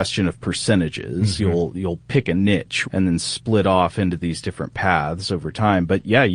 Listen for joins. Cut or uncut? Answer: cut